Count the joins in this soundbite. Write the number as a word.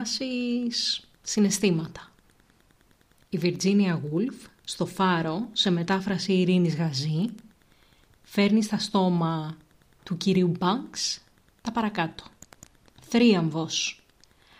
zero